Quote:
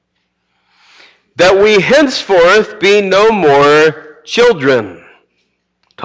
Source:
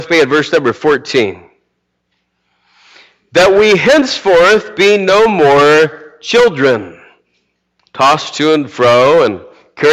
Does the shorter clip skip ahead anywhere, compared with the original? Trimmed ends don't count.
no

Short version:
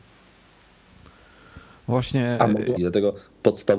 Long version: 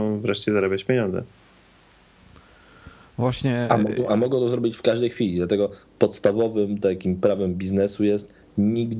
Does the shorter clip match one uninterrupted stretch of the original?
no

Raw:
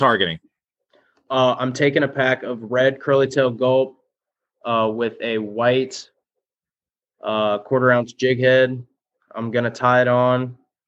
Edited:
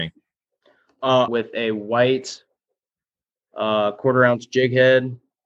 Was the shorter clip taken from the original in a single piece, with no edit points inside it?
no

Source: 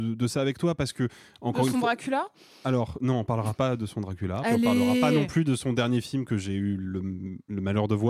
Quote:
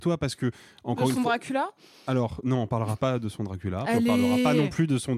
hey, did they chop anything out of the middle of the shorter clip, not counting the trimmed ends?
no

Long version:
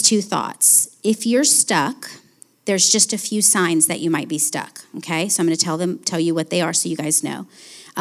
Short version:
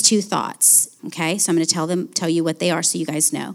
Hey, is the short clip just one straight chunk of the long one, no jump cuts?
no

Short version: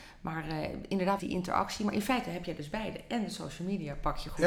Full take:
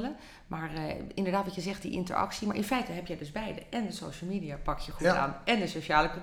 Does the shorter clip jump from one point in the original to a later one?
yes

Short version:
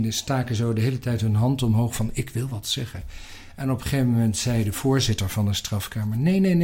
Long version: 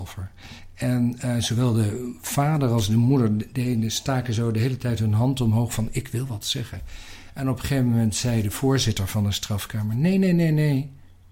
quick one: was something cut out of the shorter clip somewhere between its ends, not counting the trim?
no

